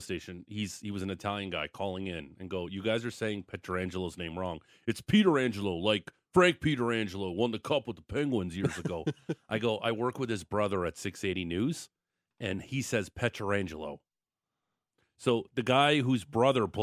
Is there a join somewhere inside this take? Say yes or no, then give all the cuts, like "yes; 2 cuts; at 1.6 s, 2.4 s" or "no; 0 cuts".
no; 0 cuts